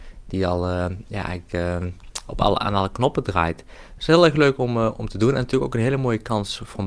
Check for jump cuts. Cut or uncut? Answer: uncut